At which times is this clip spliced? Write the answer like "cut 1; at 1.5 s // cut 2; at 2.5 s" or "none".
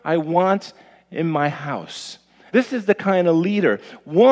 cut 1; at 2.5 s